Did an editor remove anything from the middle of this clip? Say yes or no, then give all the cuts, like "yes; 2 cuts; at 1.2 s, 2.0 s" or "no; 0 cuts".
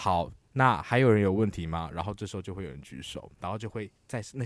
no; 0 cuts